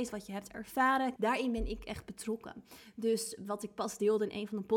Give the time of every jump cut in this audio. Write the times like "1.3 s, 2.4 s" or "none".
1.2 s

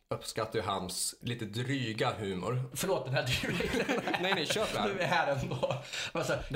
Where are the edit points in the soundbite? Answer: 1.2 s, 2.7 s

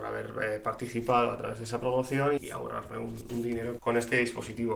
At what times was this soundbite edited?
2.4 s, 3.8 s

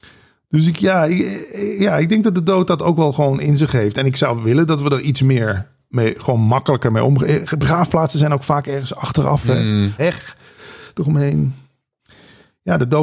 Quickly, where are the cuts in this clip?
5.8 s, 10.0 s

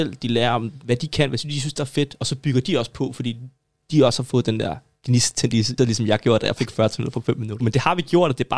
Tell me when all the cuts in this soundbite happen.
5.8 s, 7.6 s

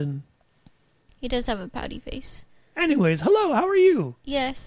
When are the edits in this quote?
2.7 s

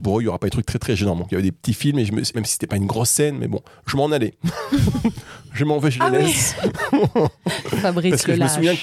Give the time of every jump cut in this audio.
2.3 s

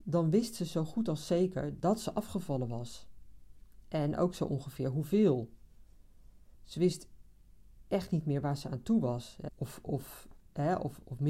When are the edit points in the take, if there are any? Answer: 6.5 s, 9.5 s

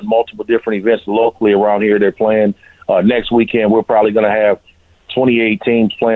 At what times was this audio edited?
none

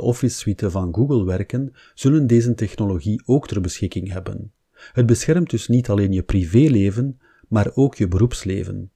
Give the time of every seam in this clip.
none

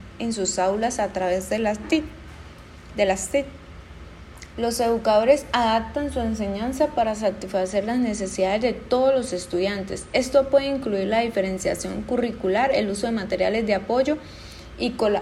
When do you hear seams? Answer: 4.5 s

